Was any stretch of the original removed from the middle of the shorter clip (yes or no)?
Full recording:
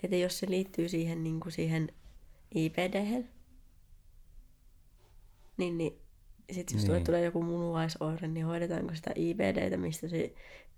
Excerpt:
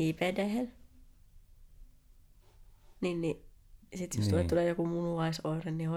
no